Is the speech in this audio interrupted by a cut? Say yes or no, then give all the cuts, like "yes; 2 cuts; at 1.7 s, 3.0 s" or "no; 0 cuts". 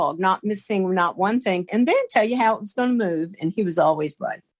yes; 1 cut; at 1.7 s